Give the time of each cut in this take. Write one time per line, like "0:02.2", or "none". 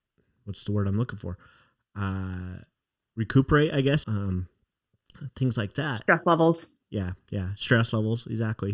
0:04.0